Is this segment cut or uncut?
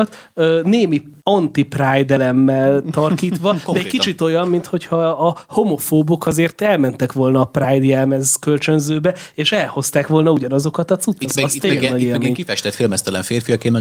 cut